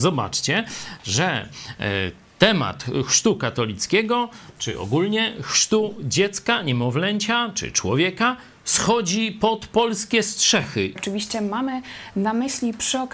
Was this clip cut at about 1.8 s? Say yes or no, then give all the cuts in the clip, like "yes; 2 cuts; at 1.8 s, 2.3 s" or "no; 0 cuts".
no; 1 cut; at 11.0 s